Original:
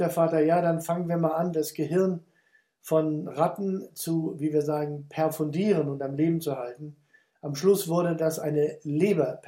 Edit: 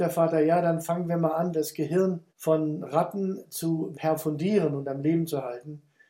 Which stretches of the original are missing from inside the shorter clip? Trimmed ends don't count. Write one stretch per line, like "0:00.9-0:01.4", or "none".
0:02.3-0:02.7
0:04.4-0:05.1